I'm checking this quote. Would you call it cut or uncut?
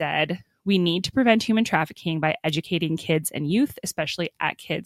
uncut